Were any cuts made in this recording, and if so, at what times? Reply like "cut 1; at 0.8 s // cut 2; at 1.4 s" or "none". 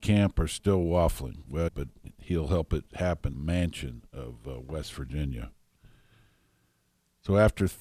cut 1; at 1.7 s // cut 2; at 3.3 s